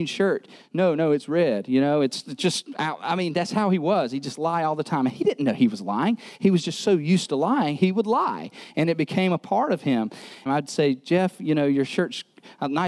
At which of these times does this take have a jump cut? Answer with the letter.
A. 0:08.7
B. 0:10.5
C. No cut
B